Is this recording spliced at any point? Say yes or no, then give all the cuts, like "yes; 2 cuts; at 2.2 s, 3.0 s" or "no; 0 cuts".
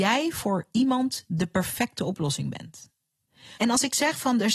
yes; 1 cut; at 3.6 s